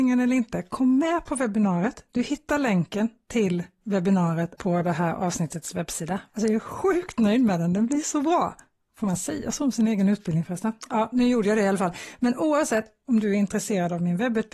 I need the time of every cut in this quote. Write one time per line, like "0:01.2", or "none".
0:04.6
0:06.3